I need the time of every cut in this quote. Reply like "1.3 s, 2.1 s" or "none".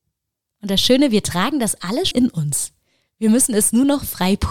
2.1 s